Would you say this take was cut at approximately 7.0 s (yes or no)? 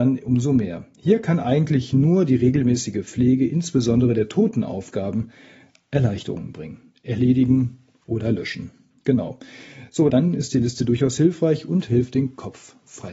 no